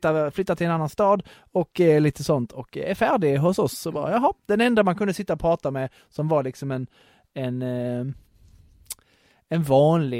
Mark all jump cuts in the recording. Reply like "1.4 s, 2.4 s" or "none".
none